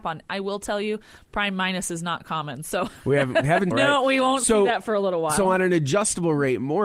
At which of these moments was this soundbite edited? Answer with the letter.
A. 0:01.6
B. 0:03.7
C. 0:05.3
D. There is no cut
B